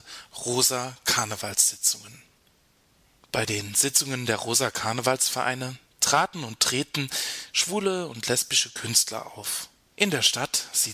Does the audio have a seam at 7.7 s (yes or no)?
no